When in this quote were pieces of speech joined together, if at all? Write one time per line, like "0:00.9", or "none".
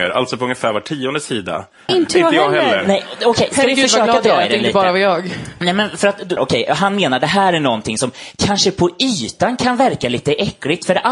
0:01.9
0:06.4